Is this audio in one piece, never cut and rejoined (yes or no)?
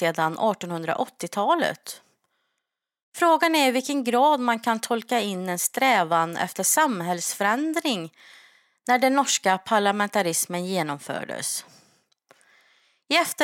yes